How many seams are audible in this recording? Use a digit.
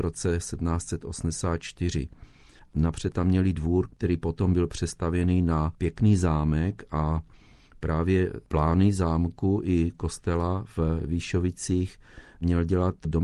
1